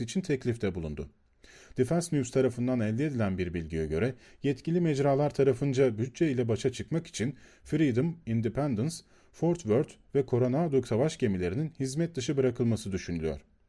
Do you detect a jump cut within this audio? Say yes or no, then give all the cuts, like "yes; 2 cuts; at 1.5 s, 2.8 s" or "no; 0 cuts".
no; 0 cuts